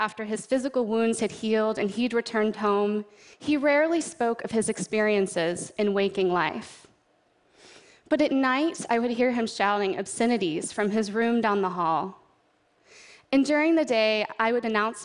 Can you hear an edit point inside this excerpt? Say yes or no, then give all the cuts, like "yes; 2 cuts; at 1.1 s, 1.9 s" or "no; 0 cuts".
no; 0 cuts